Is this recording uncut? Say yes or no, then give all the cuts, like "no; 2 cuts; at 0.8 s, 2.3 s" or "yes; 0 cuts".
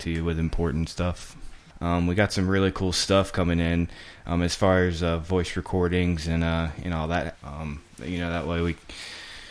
no; 1 cut; at 7.3 s